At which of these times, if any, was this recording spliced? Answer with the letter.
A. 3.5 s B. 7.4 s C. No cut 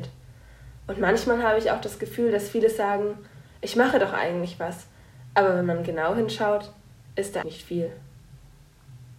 B